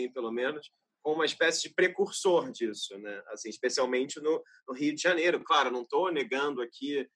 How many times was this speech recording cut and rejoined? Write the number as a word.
zero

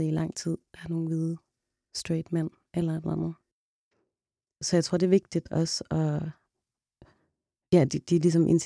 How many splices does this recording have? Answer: zero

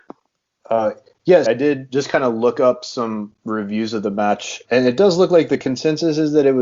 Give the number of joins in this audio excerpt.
two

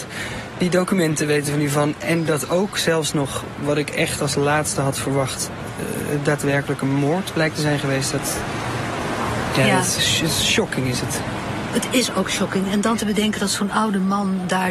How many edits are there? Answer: one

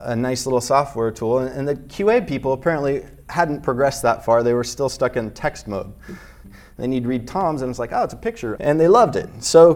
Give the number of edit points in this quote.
two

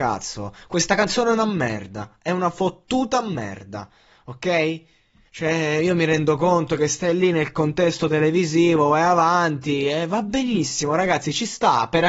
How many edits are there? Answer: one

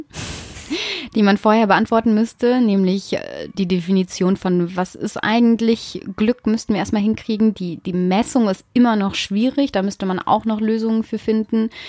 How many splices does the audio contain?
zero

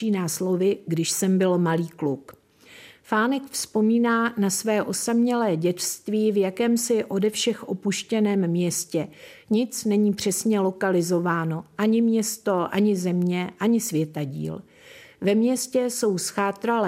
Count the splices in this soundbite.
zero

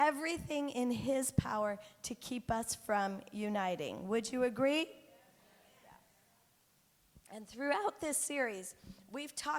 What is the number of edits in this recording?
one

